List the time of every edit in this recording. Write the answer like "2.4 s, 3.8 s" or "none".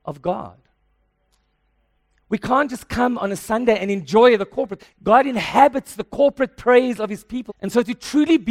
4.8 s, 7.5 s